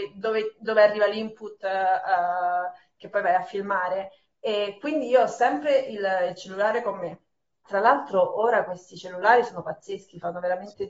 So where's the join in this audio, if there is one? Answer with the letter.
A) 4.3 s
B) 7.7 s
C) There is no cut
B